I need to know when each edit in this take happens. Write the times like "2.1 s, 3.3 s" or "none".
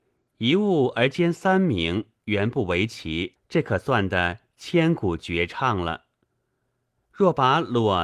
3.3 s, 7.0 s